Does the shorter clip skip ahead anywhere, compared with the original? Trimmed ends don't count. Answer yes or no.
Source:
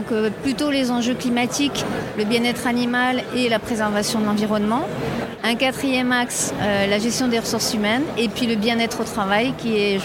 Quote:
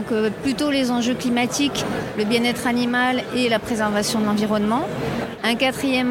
no